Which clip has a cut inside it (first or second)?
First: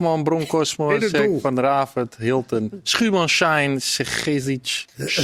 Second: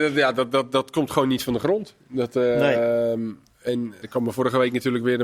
second